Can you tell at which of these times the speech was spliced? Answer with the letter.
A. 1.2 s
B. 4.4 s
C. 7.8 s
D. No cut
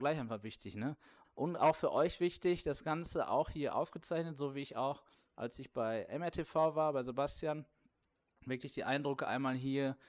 A